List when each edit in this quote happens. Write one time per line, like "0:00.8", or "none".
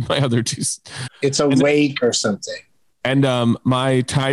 0:01.1